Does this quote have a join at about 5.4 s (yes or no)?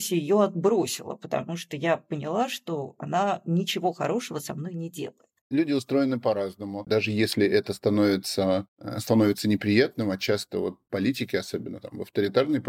yes